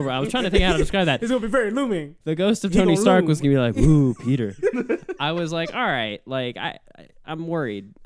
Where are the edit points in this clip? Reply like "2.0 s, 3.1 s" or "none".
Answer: none